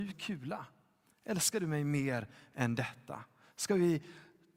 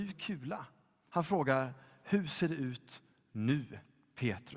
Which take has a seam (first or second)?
second